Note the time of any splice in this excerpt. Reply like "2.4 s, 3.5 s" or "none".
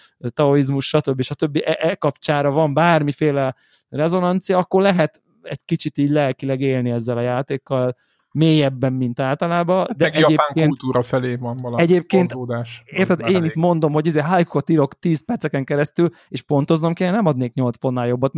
none